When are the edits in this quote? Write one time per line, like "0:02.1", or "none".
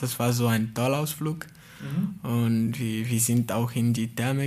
none